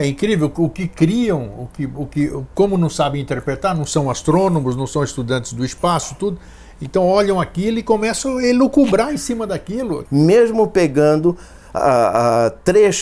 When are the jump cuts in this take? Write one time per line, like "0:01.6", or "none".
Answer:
0:10.1